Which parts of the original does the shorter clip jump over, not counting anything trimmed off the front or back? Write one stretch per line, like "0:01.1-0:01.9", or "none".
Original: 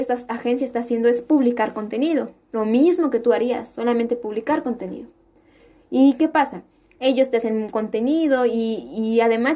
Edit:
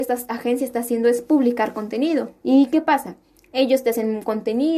0:02.4-0:05.9